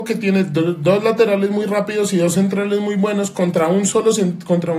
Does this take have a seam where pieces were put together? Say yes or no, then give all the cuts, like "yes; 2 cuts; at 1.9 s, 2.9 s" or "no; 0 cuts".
no; 0 cuts